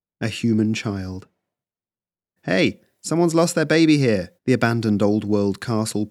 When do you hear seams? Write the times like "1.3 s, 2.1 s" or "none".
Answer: 2.4 s, 4.4 s

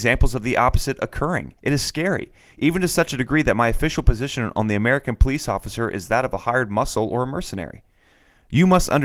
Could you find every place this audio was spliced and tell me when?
none

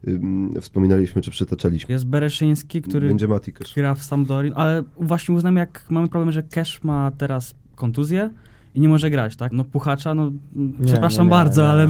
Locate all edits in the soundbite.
1.9 s, 9.5 s

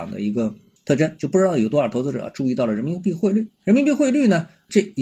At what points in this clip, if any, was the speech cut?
none

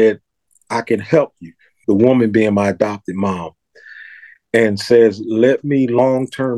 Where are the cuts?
1.8 s

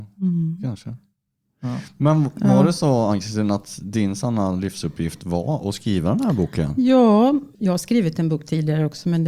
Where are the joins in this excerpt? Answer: 7.5 s

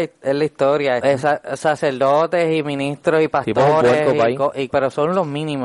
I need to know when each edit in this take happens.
1.0 s, 4.7 s

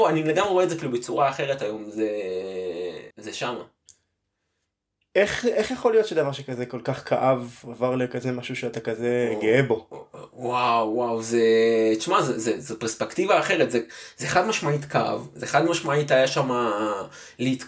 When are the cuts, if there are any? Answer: 3.1 s

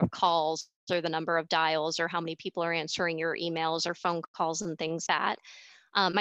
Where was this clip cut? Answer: 5.1 s

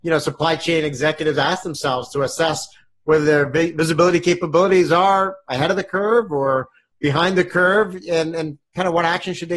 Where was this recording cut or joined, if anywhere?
none

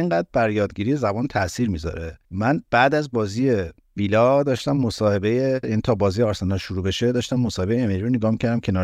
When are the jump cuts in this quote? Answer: 2.2 s

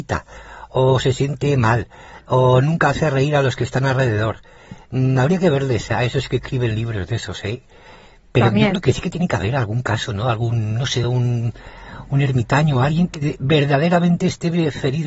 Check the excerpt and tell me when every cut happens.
11.0 s

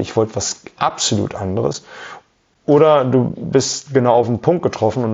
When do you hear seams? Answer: none

